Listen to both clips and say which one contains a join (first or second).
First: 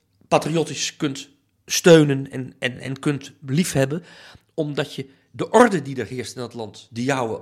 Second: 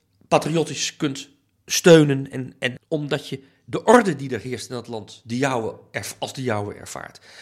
second